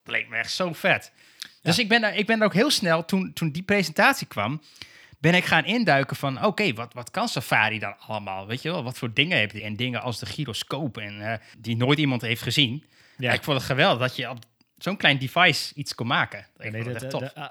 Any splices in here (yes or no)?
yes